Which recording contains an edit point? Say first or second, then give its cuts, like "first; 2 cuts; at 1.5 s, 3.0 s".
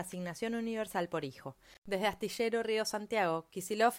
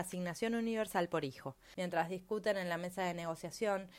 second; 1 cut; at 1.7 s